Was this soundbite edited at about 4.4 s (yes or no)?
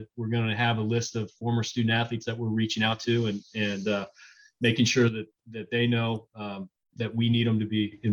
no